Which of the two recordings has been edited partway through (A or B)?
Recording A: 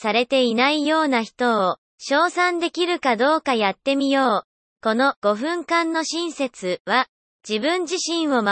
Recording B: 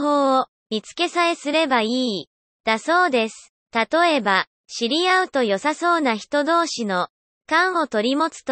A